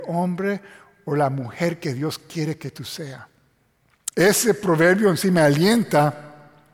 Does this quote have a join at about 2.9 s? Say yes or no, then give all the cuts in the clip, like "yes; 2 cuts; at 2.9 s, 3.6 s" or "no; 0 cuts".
no; 1 cut; at 4.1 s